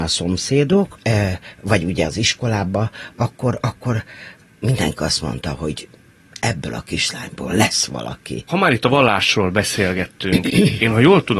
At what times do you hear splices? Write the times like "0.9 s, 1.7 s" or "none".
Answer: 1.0 s

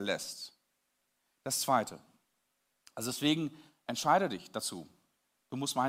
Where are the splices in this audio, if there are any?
none

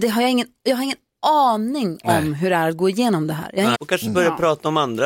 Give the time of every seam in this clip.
3.7 s

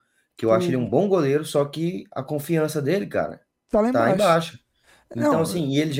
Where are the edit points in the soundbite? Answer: none

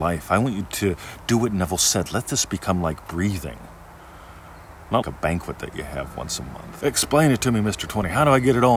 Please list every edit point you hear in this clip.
5.0 s, 6.8 s

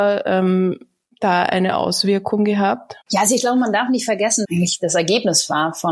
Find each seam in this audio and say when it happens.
3.0 s, 4.4 s

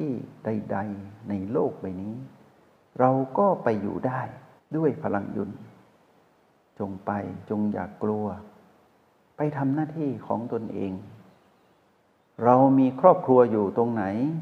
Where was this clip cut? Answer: none

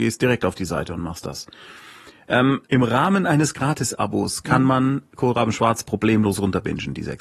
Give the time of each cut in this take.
2.7 s

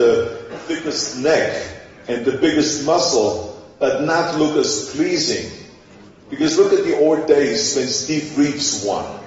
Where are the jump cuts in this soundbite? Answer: none

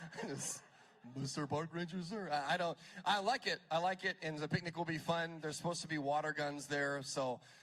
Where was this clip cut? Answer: none

